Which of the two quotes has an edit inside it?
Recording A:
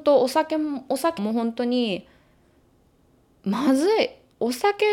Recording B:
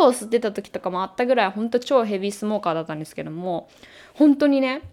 A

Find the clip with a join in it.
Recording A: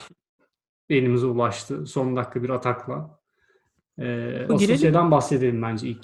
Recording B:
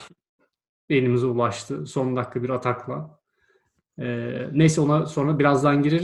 A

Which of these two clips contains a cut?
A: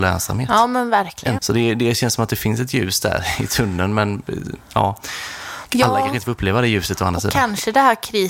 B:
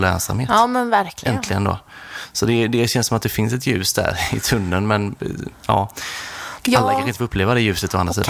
A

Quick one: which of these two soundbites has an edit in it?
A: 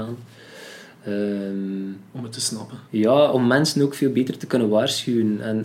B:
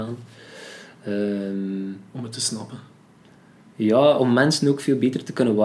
A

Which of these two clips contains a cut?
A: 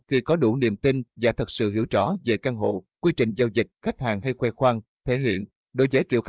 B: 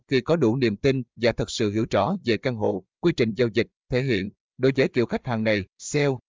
B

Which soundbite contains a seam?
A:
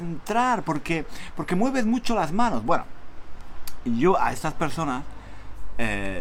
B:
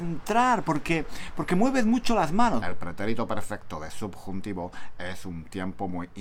B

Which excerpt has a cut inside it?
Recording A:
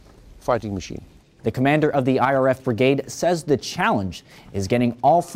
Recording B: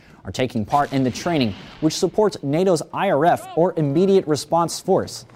A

